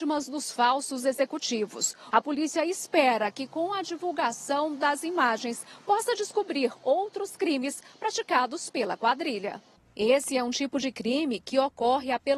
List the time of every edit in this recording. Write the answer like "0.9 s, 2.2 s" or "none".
2.1 s